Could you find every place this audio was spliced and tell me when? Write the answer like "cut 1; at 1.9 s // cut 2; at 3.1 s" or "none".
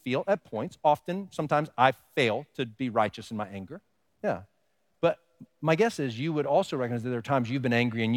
cut 1; at 4.1 s